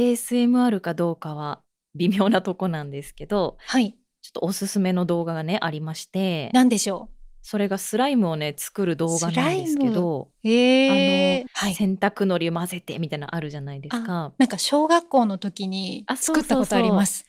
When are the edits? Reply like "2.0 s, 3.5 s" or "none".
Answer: 11.5 s